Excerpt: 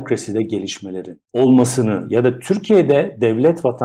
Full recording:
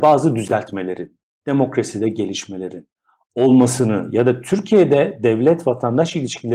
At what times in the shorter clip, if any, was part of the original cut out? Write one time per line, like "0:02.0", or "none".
0:01.3